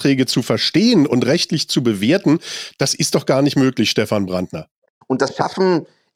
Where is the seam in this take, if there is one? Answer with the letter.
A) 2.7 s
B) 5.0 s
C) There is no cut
B